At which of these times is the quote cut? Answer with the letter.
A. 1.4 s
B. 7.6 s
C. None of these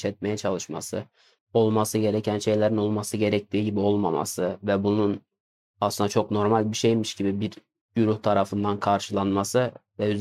A